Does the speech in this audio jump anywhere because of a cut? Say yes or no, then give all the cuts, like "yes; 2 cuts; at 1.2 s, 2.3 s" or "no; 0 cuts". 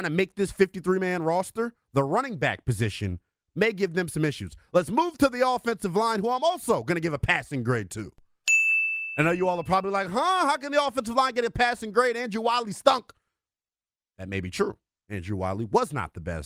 no; 0 cuts